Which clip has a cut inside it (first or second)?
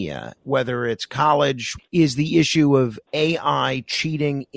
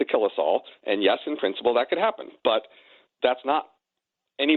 first